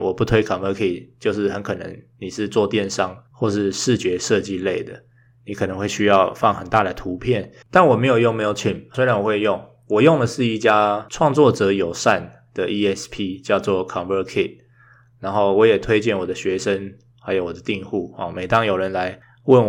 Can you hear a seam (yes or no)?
yes